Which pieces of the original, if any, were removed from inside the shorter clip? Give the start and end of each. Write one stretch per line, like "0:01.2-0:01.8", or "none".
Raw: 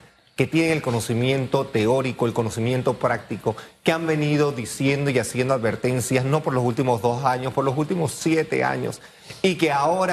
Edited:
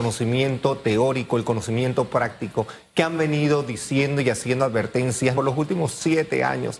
0:06.2-0:07.5